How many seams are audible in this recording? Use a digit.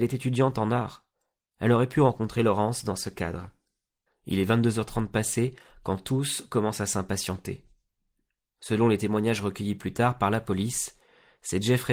1